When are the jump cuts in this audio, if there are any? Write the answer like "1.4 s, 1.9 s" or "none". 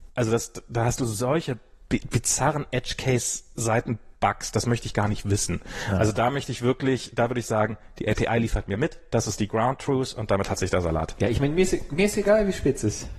none